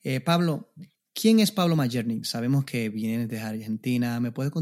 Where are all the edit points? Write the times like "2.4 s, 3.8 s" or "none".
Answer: 2.2 s